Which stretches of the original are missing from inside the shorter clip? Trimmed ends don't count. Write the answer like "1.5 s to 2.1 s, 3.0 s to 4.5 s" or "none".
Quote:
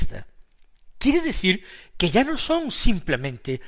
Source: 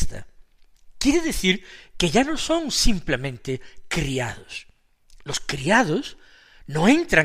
none

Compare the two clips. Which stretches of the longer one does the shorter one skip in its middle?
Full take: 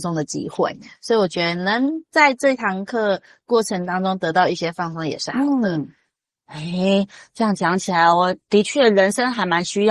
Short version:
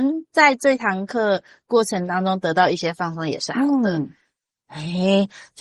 none

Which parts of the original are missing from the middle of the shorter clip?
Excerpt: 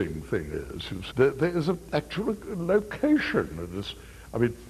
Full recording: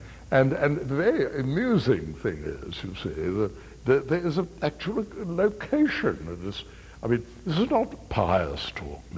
3.0 s to 3.8 s

